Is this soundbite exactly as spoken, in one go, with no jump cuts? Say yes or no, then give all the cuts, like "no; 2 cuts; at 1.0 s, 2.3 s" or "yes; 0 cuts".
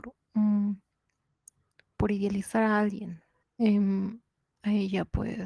no; 1 cut; at 3.4 s